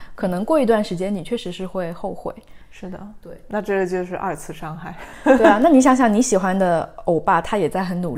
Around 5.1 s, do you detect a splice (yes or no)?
no